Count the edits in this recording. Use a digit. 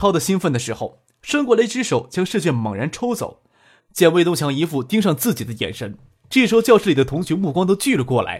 1